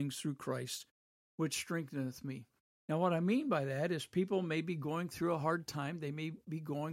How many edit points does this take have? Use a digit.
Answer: 1